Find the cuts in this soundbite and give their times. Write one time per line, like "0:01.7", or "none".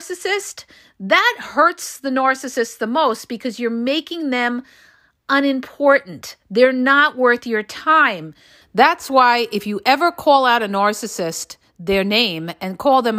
0:08.6

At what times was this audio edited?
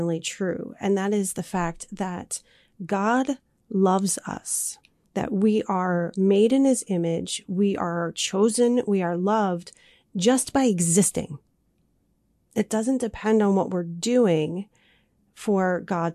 none

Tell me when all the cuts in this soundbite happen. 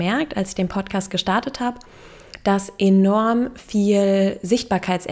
none

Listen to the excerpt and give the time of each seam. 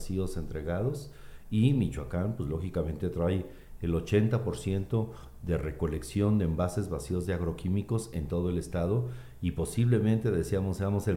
none

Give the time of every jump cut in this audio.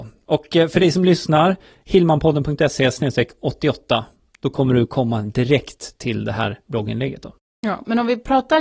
none

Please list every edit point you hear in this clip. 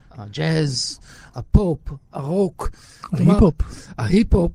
none

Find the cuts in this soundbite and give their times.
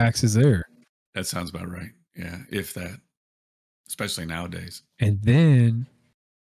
0:01.1

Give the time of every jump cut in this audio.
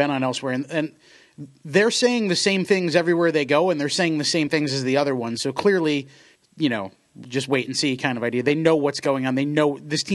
0:06.4

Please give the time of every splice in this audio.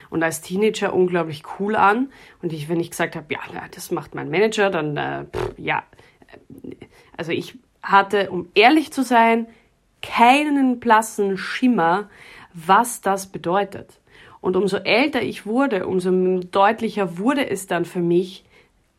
none

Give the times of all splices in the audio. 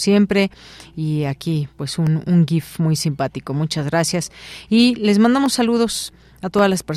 none

